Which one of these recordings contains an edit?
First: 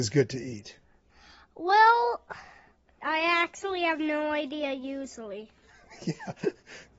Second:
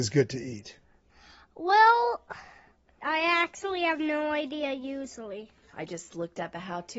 second; 1 cut; at 5.7 s

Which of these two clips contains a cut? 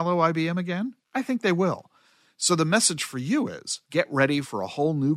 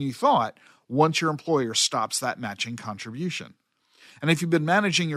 first; 2 cuts; at 1.0 s, 3.9 s

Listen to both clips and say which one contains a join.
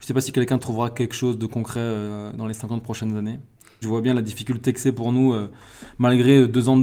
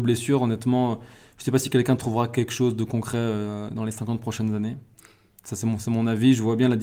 first; 1 cut; at 3.8 s

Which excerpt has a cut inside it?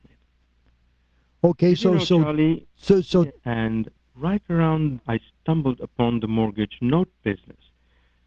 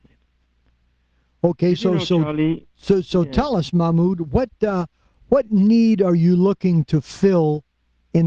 first; 2 cuts; at 3.3 s, 5.0 s

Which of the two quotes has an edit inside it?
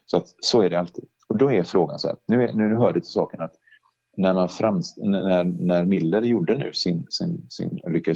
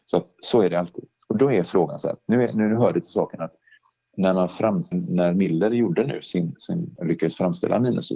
second; 2 cuts; at 4.9 s, 7.0 s

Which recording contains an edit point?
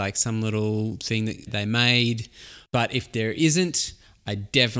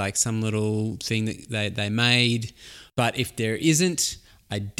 first; 1 cut; at 1.5 s

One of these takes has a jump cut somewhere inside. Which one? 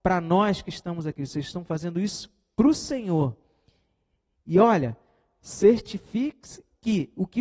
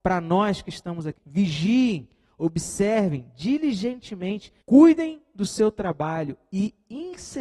second; 2 cuts; at 1.2 s, 4.6 s

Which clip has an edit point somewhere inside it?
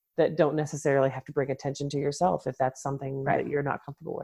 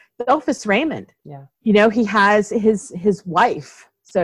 second; 1 cut; at 1.2 s

